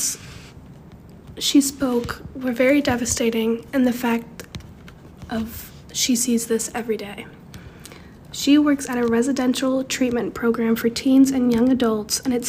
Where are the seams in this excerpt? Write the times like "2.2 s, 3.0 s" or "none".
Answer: none